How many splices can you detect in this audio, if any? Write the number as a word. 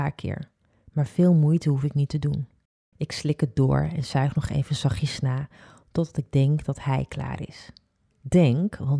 one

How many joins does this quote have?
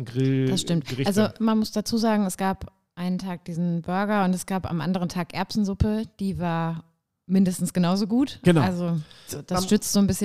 one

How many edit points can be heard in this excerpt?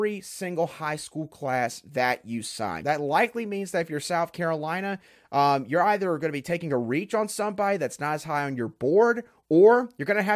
one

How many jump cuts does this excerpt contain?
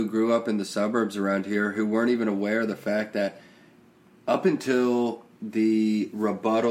zero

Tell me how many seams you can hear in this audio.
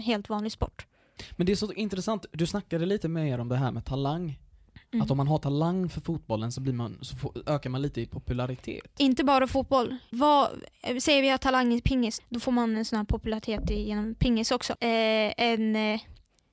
three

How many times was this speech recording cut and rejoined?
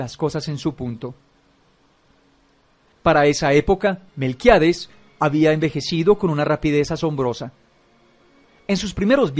two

